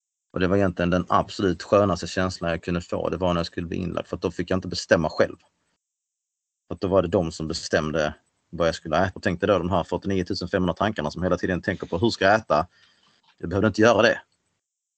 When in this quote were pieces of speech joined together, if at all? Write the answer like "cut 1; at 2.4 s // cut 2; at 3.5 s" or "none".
cut 1; at 9.1 s